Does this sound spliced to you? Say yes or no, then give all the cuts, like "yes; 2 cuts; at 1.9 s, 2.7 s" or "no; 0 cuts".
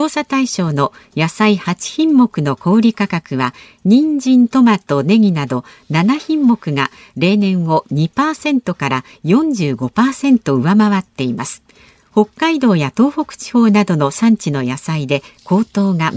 no; 0 cuts